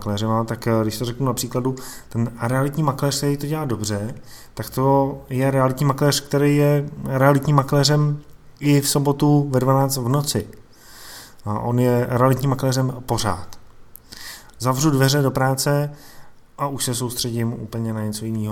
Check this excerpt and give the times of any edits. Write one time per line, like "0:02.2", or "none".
0:14.5